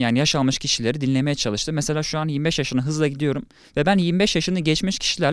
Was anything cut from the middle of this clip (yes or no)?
no